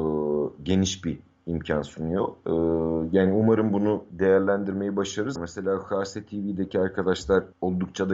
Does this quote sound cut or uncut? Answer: cut